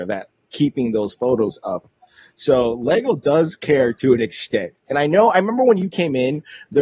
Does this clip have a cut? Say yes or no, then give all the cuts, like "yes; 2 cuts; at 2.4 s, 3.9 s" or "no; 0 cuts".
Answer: no; 0 cuts